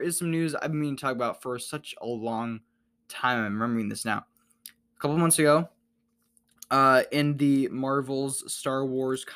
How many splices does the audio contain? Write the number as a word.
zero